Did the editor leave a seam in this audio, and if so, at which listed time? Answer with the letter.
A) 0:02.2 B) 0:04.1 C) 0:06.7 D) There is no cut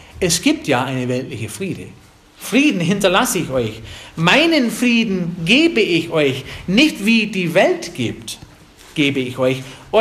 A